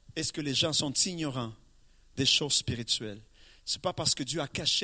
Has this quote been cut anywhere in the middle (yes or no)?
no